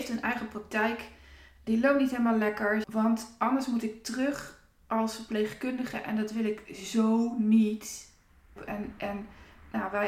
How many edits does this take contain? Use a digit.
2